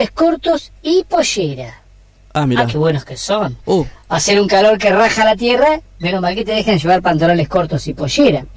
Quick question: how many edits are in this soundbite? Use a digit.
0